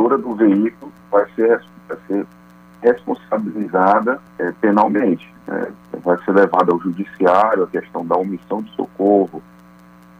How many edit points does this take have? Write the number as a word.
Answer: one